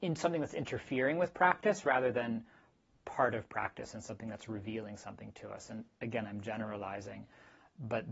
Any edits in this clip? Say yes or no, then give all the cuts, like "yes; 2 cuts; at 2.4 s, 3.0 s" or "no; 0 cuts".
no; 0 cuts